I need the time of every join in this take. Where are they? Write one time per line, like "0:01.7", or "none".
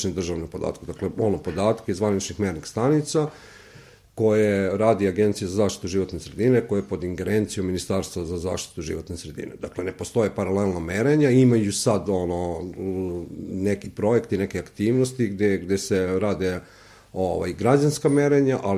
none